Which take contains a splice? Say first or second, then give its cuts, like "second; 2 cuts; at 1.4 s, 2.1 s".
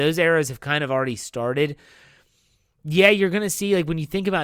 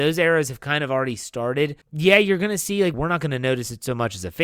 second; 2 cuts; at 1.8 s, 2.9 s